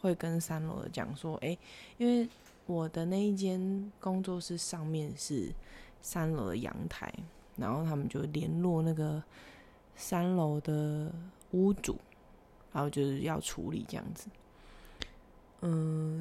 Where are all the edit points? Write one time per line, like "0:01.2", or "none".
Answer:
none